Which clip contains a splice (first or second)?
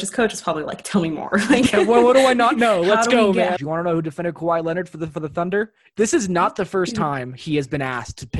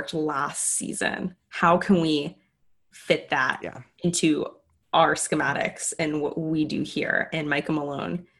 first